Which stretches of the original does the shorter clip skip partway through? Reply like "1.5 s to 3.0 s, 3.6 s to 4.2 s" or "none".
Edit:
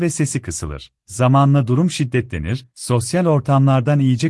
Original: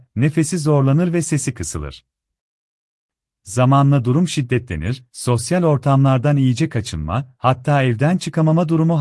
2.1 s to 3.4 s